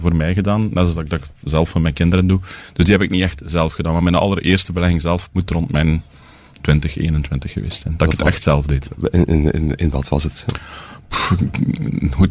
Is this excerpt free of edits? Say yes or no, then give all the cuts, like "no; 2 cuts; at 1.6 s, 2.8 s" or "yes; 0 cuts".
yes; 0 cuts